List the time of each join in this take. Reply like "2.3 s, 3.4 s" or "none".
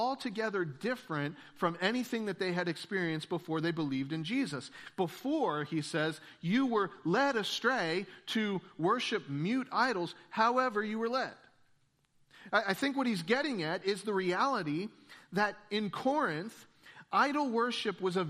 none